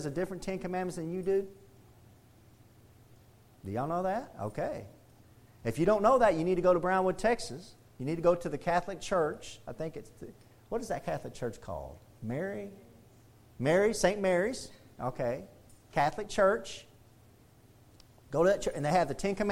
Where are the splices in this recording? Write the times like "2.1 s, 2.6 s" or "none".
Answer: none